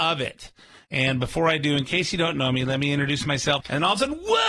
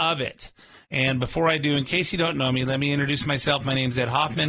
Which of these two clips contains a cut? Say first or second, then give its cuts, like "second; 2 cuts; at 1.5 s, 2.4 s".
first; 1 cut; at 3.6 s